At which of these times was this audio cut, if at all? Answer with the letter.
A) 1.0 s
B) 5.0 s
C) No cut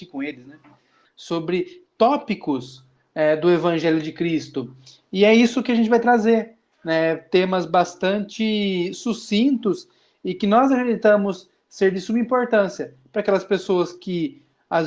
A